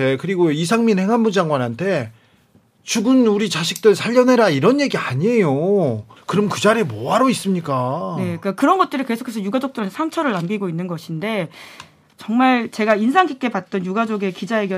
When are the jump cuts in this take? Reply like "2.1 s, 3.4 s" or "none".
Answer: 6.2 s